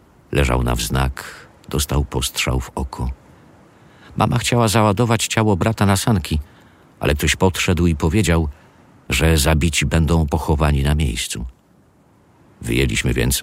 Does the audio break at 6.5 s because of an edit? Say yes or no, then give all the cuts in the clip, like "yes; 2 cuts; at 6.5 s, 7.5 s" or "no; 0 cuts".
no; 1 cut; at 9.1 s